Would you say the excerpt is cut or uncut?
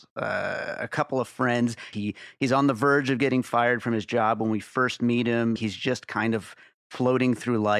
cut